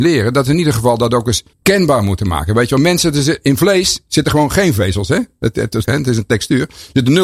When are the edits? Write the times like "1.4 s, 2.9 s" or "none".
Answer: 1.5 s, 5.8 s